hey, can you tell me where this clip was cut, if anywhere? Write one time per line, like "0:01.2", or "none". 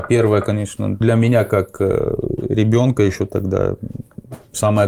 0:01.0